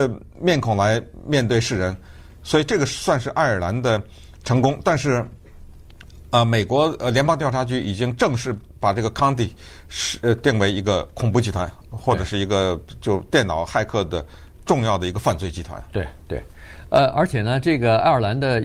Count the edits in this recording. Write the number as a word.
zero